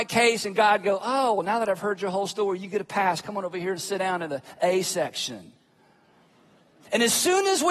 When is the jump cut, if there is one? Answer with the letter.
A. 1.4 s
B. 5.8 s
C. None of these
C